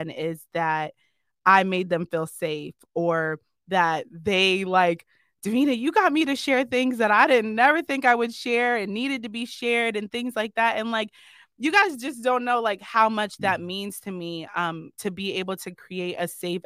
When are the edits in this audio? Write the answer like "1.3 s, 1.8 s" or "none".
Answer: none